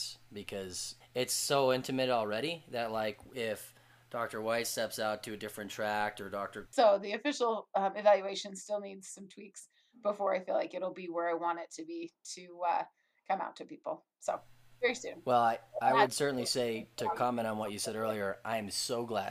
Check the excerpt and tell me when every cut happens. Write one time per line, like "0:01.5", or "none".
0:06.7